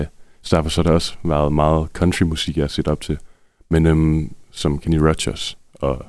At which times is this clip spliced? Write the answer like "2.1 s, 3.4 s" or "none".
none